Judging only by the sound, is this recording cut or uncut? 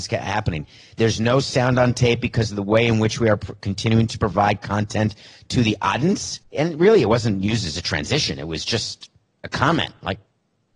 cut